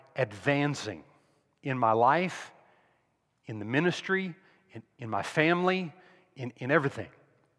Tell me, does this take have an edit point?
no; 0 cuts

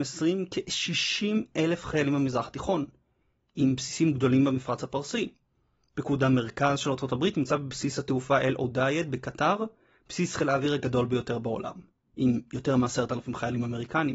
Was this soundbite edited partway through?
no; 0 cuts

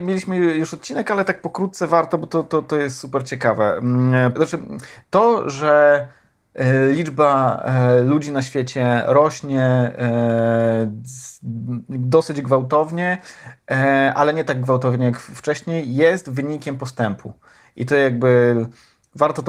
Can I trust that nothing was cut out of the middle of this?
no; 1 cut; at 4.4 s

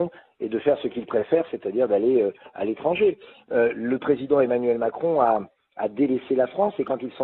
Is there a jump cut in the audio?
no; 0 cuts

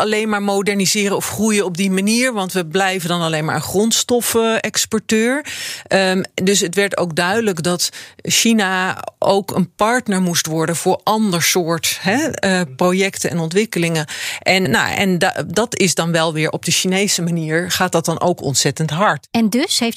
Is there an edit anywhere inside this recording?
yes; 1 cut; at 14.7 s

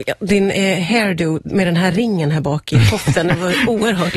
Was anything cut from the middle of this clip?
no; 0 cuts

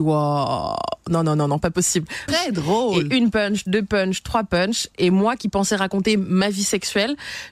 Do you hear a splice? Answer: yes; 1 cut; at 2.3 s

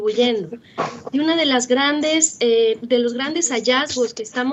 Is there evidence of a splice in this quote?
no; 0 cuts

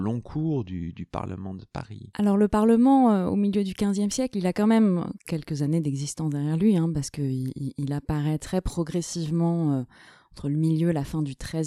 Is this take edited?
no; 0 cuts

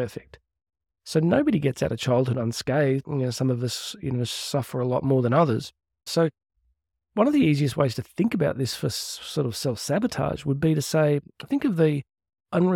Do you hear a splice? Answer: yes; 2 cuts; at 3.0 s, 6.1 s

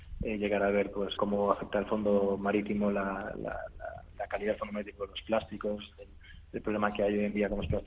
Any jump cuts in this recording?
yes; 1 cut; at 1.2 s

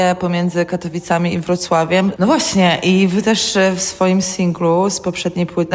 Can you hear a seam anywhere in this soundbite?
yes; 1 cut; at 2.2 s

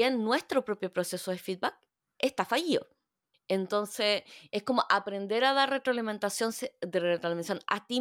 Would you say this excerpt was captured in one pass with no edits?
no; 1 cut; at 3.3 s

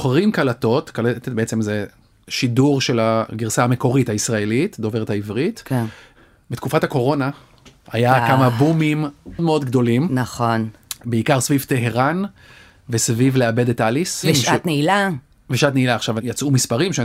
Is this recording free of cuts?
no; 1 cut; at 9.4 s

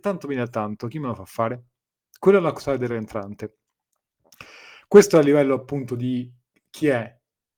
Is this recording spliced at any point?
no; 0 cuts

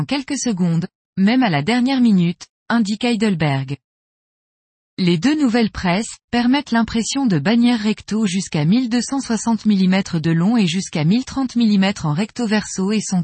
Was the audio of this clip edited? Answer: yes; 1 cut; at 6.2 s

